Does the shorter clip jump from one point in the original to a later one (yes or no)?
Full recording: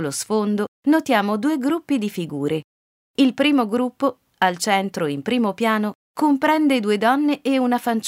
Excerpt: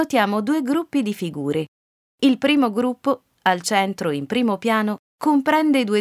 no